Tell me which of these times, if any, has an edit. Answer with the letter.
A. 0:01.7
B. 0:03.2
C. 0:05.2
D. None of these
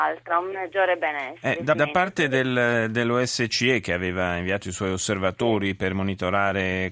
A